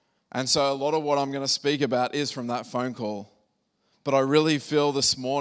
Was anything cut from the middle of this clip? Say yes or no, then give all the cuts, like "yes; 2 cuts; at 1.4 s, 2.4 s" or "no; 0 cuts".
yes; 1 cut; at 3.9 s